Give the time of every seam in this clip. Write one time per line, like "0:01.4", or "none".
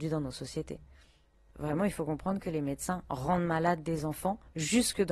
none